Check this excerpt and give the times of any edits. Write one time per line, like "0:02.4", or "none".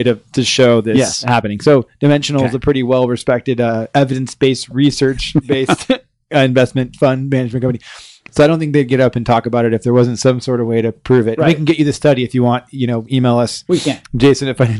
none